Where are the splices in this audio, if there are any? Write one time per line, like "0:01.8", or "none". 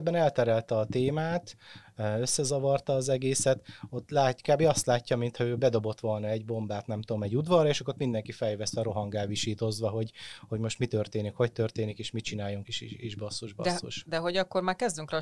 0:12.6